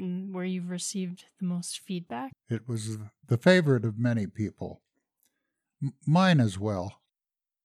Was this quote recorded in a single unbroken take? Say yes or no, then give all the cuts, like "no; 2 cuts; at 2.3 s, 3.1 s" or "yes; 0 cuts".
no; 1 cut; at 2.3 s